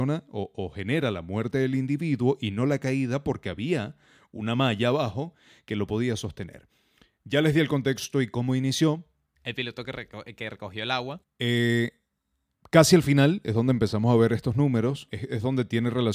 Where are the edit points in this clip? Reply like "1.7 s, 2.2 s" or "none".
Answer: 9.3 s, 11.2 s, 15.1 s

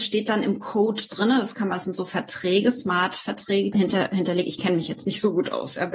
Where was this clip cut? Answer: 3.7 s

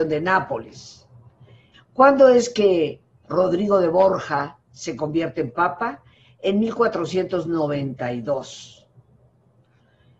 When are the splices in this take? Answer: 1.7 s

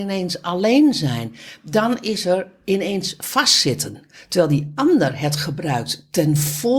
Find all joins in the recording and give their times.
none

